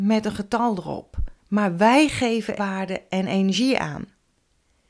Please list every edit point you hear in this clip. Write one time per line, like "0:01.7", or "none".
0:01.4
0:02.6